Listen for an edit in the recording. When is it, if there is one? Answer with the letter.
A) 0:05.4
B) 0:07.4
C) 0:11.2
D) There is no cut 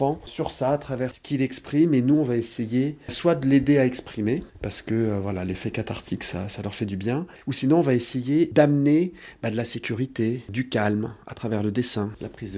D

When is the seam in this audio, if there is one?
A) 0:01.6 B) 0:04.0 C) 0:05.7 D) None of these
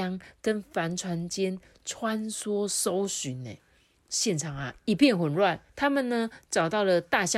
C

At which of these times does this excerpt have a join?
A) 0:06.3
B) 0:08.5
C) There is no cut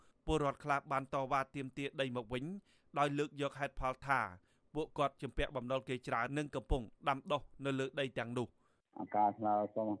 A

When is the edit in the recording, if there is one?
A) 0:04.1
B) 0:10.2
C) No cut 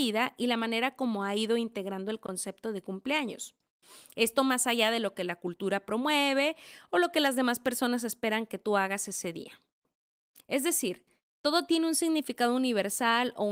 C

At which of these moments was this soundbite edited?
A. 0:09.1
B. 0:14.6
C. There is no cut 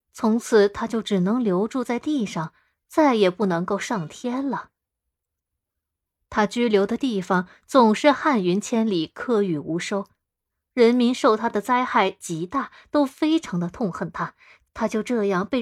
B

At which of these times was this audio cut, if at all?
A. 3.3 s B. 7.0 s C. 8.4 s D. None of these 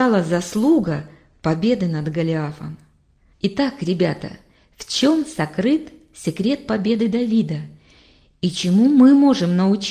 A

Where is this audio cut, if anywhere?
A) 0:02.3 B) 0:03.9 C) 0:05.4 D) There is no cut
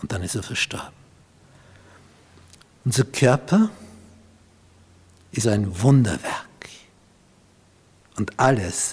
C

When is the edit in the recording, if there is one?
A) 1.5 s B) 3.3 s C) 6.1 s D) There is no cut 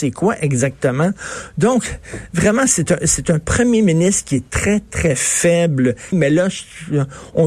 C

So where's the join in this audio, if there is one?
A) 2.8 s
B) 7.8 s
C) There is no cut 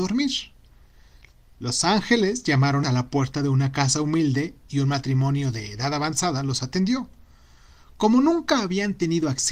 A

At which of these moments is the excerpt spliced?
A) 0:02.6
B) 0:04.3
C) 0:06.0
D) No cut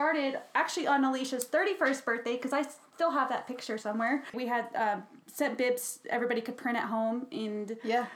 B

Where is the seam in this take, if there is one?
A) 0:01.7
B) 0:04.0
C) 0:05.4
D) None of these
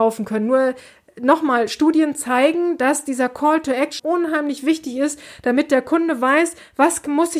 B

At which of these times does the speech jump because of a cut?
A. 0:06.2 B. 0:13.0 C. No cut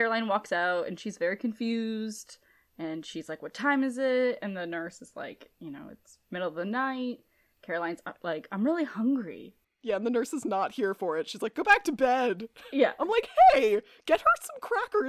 A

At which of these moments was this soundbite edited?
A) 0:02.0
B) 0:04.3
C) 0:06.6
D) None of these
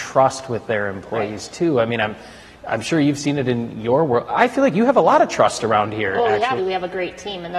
C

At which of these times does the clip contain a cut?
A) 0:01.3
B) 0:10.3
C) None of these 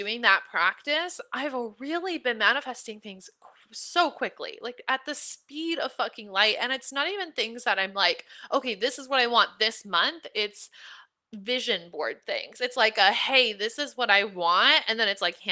C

